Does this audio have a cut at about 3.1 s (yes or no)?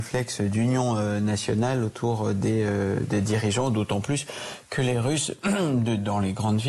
no